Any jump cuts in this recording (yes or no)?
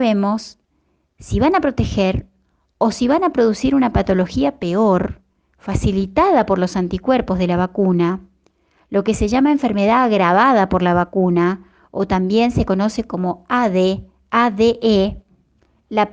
no